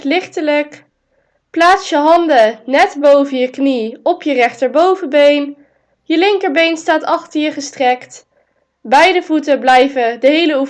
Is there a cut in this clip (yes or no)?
no